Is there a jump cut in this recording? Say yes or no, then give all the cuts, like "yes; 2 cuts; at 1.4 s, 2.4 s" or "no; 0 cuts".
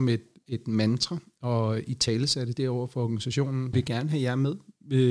yes; 1 cut; at 3.7 s